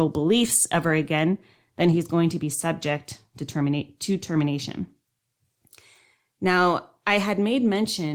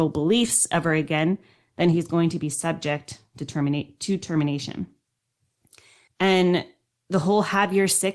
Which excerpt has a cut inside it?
second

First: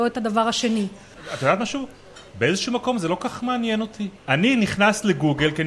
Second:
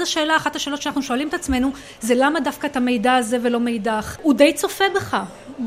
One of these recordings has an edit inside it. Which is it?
second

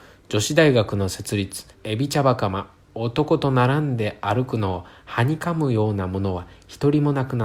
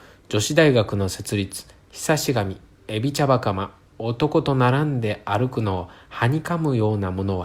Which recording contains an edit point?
first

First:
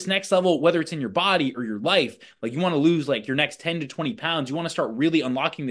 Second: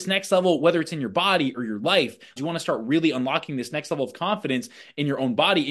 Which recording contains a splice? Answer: second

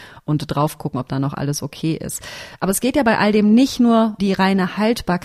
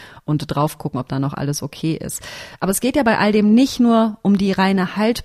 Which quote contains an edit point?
first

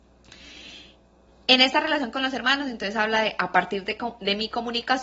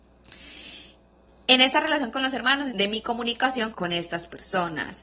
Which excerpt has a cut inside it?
second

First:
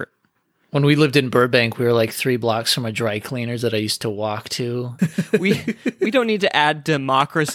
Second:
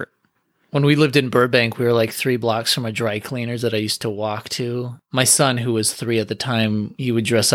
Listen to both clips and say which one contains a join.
first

